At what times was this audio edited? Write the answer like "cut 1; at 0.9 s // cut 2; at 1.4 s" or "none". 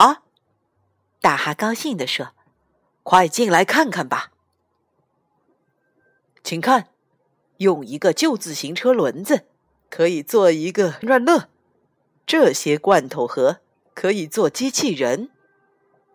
cut 1; at 11.0 s